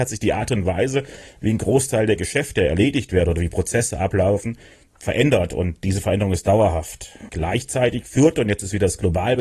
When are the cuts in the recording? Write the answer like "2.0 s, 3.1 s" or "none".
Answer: none